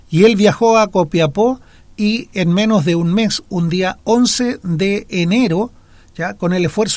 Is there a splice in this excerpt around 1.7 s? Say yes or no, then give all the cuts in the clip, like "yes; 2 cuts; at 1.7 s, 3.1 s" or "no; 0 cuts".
no; 0 cuts